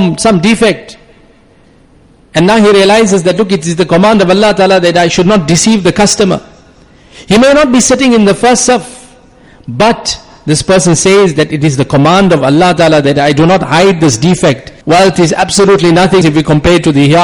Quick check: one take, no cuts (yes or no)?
no